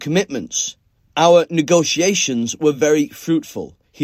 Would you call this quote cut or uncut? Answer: uncut